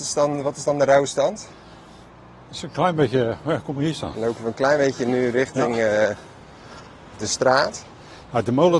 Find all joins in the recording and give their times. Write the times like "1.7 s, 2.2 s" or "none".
none